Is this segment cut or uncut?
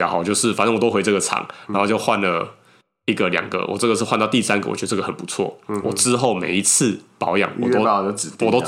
uncut